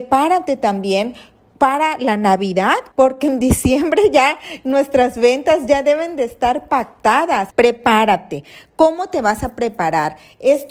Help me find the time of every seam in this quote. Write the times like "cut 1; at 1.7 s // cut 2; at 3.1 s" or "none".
cut 1; at 2.9 s // cut 2; at 7.5 s